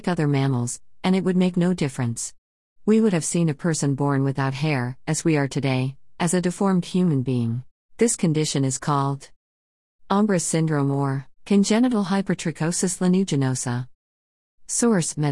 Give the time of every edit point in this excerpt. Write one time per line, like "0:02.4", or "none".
0:07.9
0:11.4